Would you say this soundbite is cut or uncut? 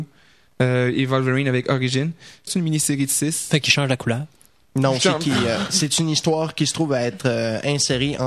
cut